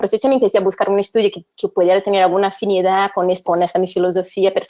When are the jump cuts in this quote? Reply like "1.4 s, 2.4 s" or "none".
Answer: 1.5 s, 3.4 s